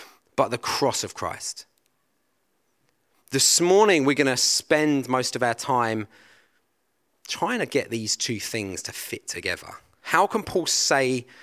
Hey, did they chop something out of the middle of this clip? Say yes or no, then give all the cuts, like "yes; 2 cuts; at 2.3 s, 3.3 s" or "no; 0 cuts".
no; 0 cuts